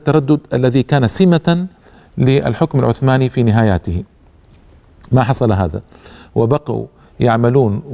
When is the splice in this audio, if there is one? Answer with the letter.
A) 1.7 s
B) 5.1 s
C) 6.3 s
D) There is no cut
D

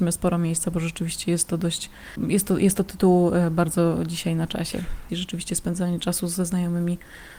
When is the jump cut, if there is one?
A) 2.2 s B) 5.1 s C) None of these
B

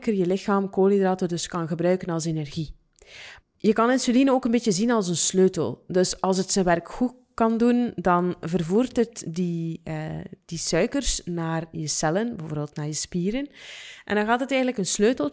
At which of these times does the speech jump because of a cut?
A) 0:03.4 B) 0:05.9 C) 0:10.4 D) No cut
A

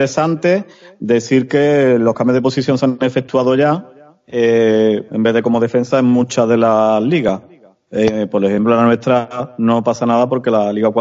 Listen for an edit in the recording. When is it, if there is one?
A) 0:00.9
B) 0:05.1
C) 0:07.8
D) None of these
B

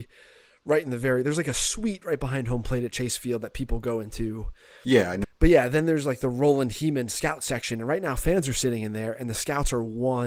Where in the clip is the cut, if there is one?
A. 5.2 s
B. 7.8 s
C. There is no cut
A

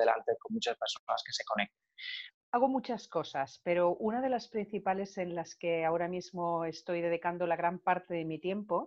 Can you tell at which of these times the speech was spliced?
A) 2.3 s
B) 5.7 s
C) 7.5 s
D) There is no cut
A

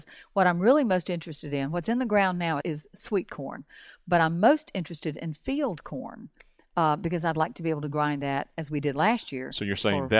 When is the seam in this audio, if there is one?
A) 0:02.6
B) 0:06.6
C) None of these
A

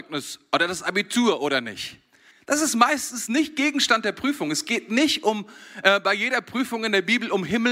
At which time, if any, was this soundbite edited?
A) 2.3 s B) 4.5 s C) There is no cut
A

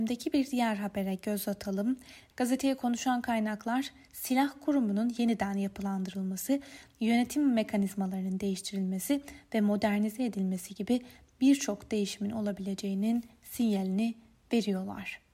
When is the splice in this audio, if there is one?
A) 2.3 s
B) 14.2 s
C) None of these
A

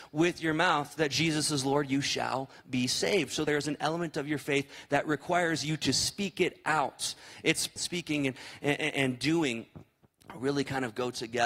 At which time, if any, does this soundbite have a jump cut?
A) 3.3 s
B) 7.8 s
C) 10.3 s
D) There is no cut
B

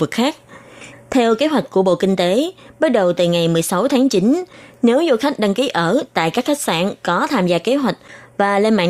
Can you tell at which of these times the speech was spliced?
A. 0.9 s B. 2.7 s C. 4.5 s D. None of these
A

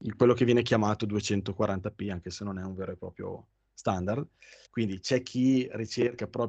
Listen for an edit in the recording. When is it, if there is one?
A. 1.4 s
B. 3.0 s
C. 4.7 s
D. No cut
C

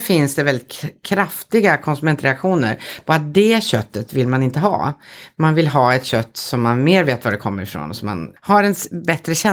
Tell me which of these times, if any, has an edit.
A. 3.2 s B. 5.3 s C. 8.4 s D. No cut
C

